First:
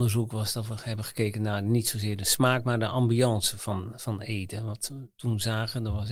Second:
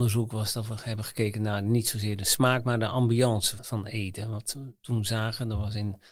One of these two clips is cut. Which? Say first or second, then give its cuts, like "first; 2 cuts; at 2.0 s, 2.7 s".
second; 1 cut; at 3.6 s